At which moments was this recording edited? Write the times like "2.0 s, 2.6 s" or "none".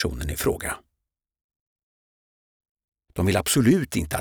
3.1 s